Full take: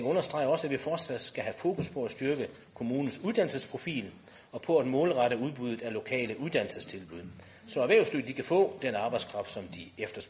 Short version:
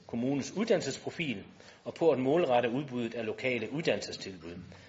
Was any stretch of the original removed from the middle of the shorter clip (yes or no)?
no